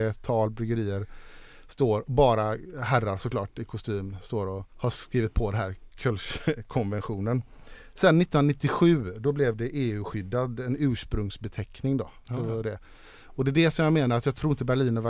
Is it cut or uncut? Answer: cut